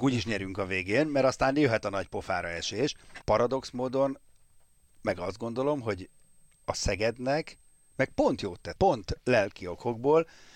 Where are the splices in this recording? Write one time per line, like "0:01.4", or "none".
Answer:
0:03.2
0:08.7